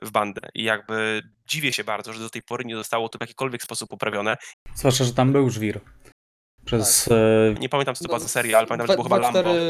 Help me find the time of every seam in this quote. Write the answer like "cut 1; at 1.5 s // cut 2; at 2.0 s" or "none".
cut 1; at 4.5 s // cut 2; at 7.6 s